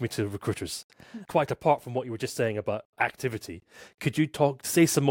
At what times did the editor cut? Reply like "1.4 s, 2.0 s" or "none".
1.3 s